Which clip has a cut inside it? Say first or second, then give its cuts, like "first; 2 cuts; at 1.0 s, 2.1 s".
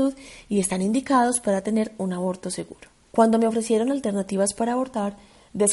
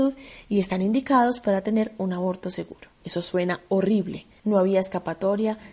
second; 2 cuts; at 3.0 s, 4.4 s